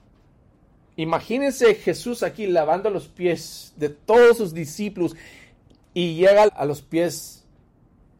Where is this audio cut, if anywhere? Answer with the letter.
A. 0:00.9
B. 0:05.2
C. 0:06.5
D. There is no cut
C